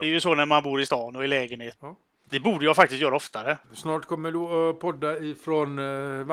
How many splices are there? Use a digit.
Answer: 2